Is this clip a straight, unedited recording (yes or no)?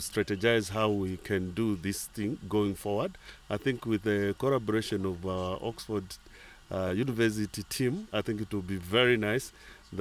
yes